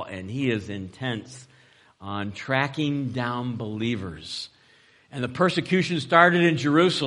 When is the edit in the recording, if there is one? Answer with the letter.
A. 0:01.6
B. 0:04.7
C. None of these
C